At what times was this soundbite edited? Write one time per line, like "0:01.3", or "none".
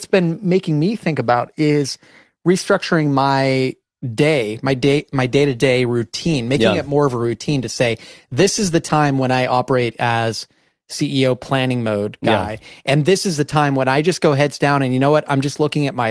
none

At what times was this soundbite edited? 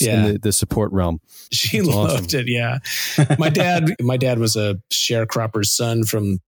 0:01.5
0:04.0

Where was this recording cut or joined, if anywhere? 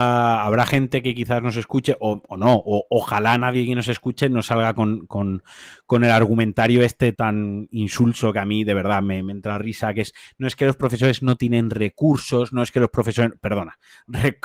0:07.1

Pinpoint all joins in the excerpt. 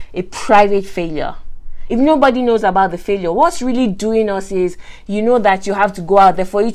none

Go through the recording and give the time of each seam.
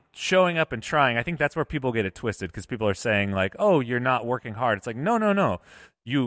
none

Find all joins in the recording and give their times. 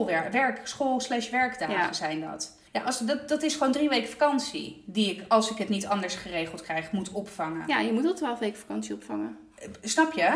0:02.7

